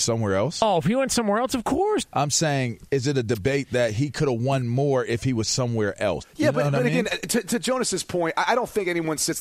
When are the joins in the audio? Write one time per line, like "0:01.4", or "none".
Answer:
0:02.0
0:06.2